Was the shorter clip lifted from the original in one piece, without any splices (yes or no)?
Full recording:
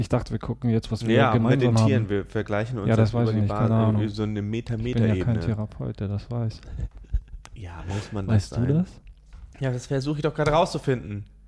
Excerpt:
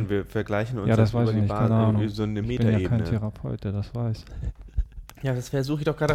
no